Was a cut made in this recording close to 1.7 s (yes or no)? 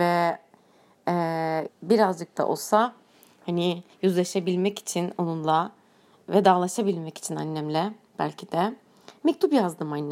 yes